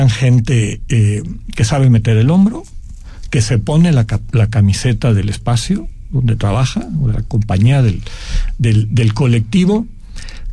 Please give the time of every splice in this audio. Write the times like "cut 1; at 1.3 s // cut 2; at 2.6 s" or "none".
none

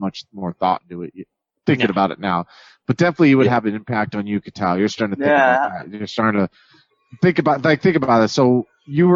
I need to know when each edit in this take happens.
none

